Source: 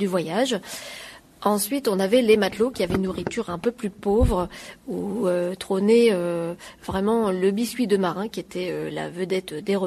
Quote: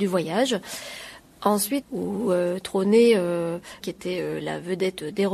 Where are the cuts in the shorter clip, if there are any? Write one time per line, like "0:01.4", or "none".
0:01.8
0:03.8